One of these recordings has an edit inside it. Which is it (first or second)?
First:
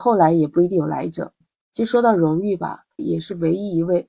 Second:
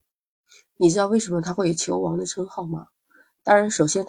first